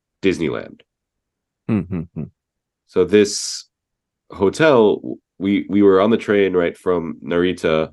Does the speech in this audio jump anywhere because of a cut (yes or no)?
no